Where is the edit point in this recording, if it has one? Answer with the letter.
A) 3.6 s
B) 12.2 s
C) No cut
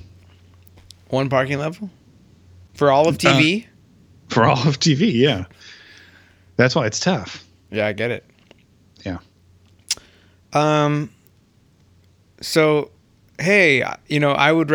C